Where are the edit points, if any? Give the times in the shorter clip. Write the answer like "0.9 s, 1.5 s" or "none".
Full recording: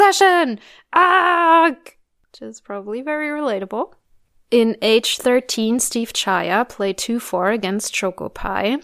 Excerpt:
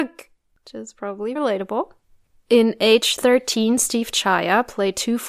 1.4 s